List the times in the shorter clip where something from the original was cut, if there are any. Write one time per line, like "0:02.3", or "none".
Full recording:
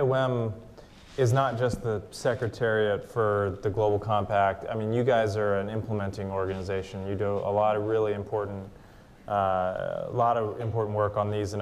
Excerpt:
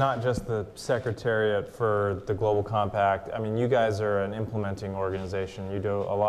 none